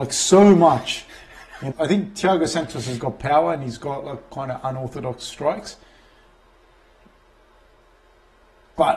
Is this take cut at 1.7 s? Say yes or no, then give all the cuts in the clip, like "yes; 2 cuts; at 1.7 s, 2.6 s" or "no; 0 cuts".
yes; 2 cuts; at 1.7 s, 3.0 s